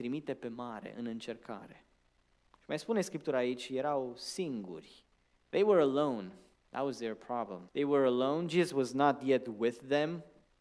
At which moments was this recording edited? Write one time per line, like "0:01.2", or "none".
0:05.5
0:07.7

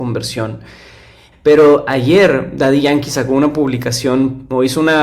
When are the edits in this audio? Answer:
0:01.3

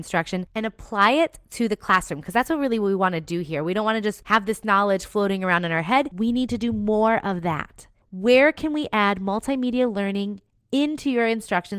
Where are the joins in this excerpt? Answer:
0:06.1

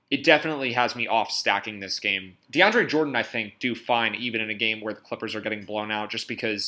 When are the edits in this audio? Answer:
0:02.4
0:03.6

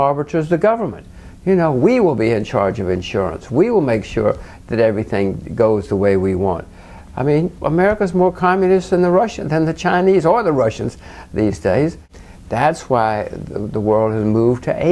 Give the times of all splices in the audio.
0:07.6

